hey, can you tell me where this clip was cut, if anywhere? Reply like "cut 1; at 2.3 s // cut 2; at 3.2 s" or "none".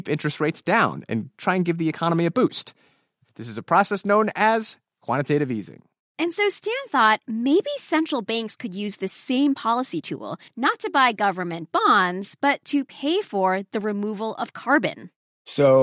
cut 1; at 10.5 s